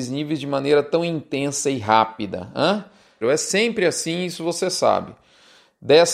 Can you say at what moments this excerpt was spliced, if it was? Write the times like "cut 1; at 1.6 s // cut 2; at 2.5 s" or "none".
cut 1; at 3.2 s

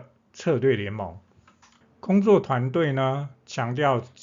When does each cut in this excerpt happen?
cut 1; at 1.8 s

